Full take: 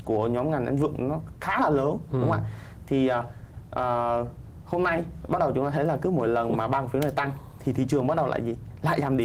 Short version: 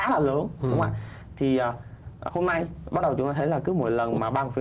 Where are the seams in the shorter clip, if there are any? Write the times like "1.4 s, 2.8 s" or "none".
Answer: 2.3 s

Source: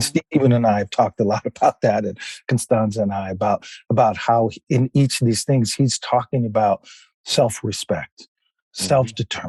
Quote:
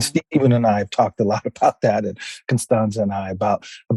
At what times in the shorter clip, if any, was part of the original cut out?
none

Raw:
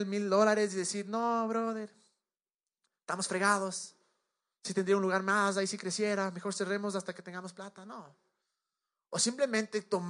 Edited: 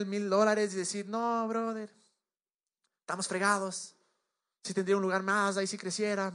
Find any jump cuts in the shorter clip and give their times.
none

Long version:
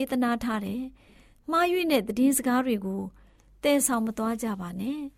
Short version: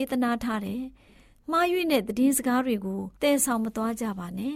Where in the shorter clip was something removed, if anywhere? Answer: 3.2 s

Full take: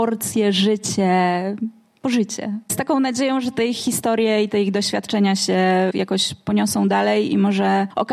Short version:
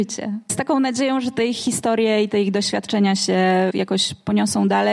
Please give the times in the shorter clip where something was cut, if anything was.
none

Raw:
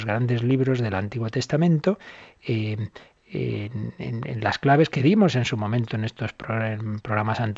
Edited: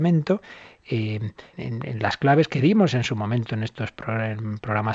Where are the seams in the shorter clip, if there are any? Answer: 1.5 s

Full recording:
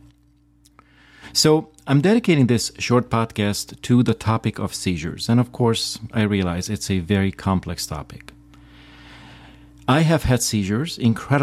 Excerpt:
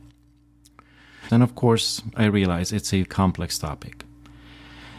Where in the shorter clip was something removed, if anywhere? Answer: 1.3 s, 3.0 s

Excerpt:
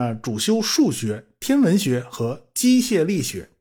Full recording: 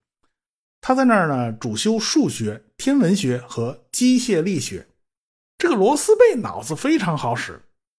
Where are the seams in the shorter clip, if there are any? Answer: none

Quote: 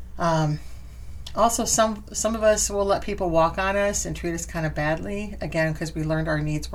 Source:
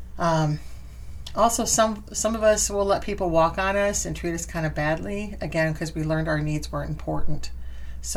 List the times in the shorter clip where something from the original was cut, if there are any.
none

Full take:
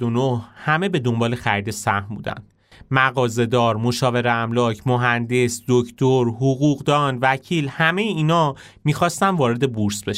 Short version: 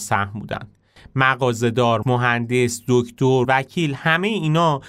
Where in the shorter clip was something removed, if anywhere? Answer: 2.0 s, 3.4 s

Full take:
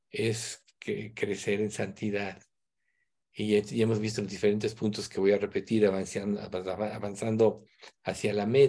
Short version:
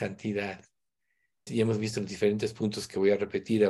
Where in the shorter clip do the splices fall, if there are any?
1.5 s

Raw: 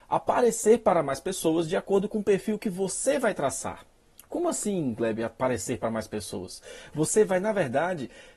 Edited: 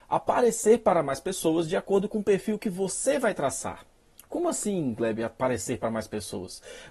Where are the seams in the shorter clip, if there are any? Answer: none

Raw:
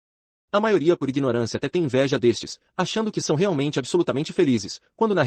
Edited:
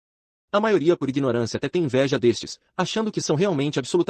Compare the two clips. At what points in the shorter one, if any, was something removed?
none

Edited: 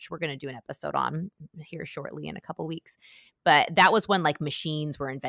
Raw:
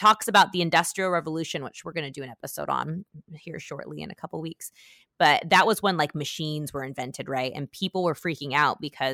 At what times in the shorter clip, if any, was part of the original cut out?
none

